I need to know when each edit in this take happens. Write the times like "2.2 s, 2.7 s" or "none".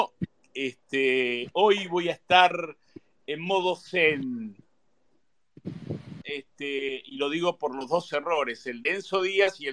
6.2 s